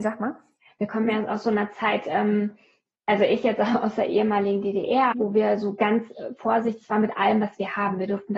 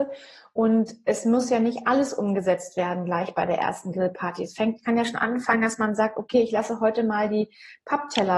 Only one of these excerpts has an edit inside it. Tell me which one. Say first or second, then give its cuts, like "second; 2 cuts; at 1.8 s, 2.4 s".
first; 1 cut; at 5.1 s